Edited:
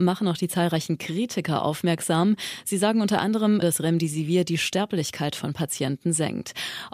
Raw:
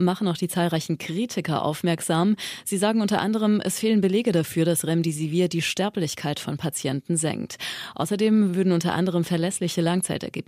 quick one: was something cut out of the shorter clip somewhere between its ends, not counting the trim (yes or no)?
yes